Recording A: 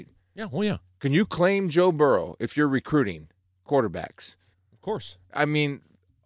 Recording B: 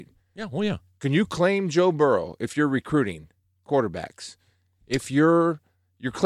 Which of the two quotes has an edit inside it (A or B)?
A